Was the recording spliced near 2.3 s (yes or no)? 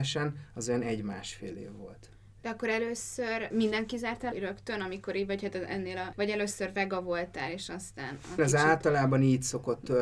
no